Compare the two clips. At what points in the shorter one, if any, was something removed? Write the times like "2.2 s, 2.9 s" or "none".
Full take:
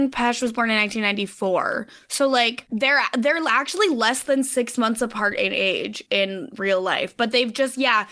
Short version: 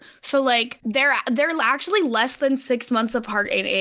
none